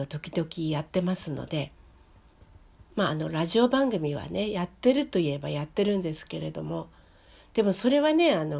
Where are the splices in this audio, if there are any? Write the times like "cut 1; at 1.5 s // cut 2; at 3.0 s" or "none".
none